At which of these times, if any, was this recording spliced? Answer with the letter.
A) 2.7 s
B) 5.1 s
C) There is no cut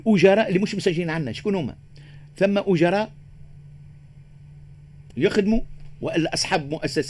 B